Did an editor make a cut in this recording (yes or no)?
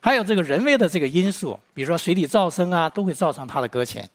yes